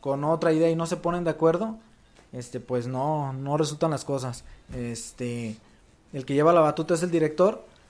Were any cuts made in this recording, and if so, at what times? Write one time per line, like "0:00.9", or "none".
0:04.6

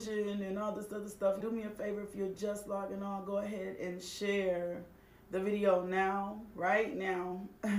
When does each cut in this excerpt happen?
0:01.4

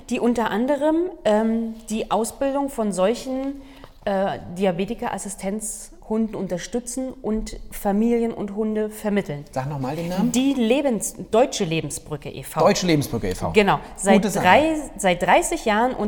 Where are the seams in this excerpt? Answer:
none

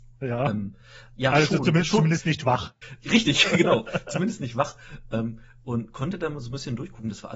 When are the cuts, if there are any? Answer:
0:01.1

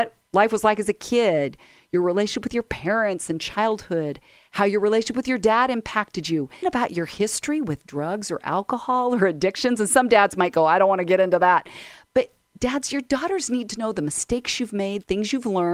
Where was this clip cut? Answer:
0:06.6

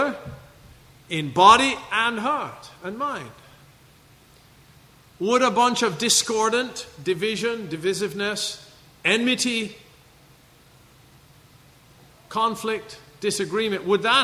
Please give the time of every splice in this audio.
none

